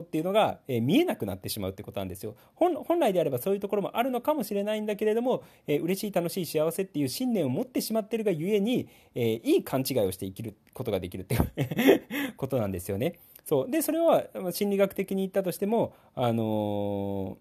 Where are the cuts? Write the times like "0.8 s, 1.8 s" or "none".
none